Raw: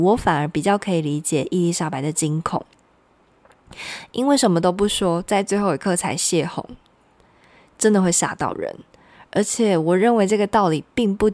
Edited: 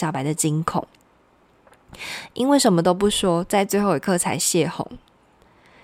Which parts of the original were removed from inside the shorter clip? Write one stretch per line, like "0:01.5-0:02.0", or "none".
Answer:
none